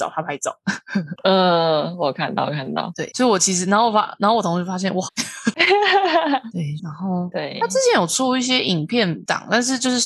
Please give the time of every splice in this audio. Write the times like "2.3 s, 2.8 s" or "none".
5.1 s, 6.8 s

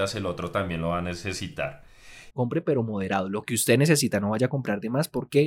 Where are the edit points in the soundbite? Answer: 2.3 s

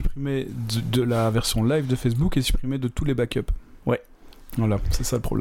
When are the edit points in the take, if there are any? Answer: none

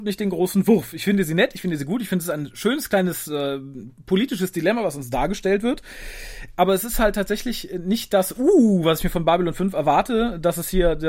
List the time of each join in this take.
none

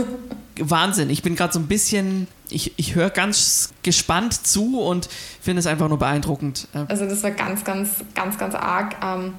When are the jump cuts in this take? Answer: 6.9 s

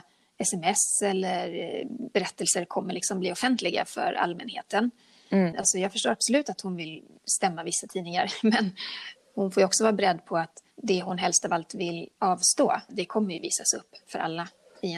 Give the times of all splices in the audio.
5.5 s, 10.7 s, 12.9 s

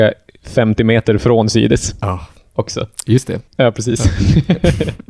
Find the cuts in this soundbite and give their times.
3.5 s

